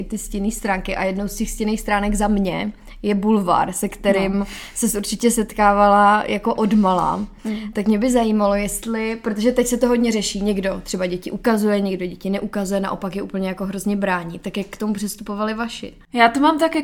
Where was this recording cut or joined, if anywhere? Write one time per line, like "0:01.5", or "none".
none